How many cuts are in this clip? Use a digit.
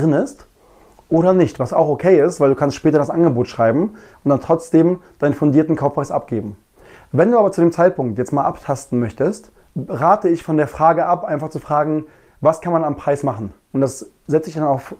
2